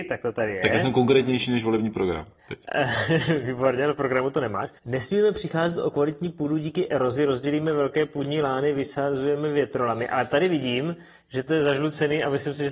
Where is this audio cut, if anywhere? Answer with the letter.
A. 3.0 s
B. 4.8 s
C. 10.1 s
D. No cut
B